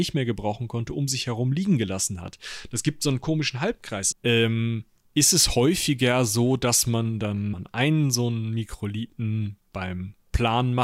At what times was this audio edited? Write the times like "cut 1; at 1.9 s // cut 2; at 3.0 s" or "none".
cut 1; at 4.1 s